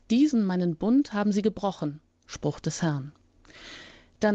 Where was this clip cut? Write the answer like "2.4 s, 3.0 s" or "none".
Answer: 2.2 s

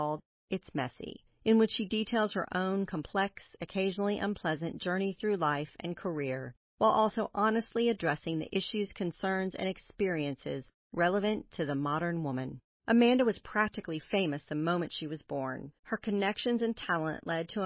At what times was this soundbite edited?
15.8 s

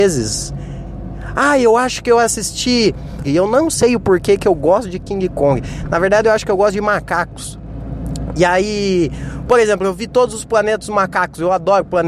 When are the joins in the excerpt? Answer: 3.2 s

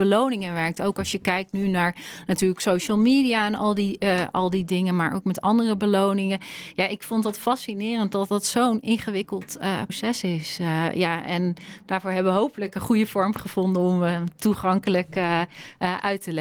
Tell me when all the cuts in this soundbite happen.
9.9 s

